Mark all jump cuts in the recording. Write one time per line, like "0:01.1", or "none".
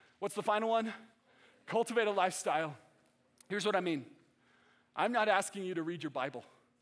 none